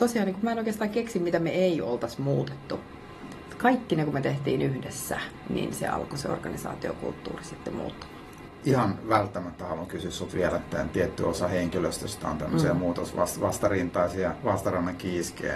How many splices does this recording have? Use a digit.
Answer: 2